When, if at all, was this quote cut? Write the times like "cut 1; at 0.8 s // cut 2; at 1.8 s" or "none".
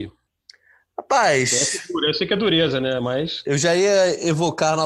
none